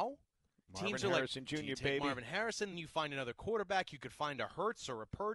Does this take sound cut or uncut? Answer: cut